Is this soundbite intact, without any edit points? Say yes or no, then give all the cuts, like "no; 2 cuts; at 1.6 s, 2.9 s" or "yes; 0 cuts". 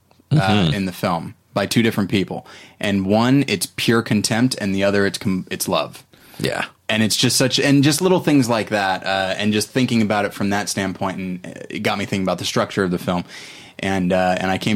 yes; 0 cuts